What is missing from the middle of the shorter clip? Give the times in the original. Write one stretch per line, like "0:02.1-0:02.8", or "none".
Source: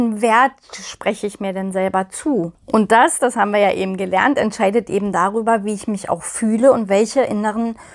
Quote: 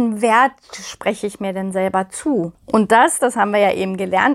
none